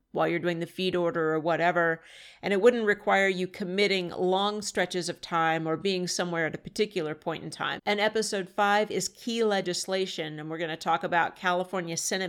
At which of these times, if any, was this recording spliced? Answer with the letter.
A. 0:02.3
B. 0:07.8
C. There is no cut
B